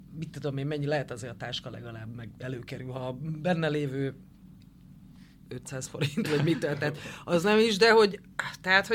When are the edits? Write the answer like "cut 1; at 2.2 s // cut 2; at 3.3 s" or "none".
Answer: none